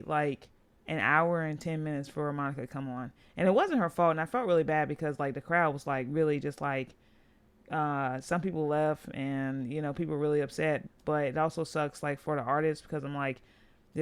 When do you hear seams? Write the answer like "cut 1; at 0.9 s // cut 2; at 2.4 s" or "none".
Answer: cut 1; at 10.9 s